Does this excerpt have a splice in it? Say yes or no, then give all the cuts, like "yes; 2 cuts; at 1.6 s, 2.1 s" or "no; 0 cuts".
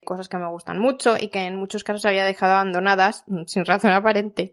no; 0 cuts